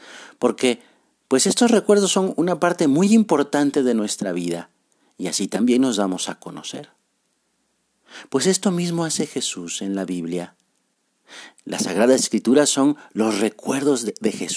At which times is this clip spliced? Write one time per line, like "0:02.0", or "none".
none